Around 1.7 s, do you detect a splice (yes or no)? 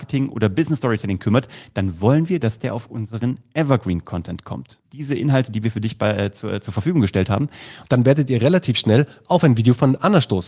no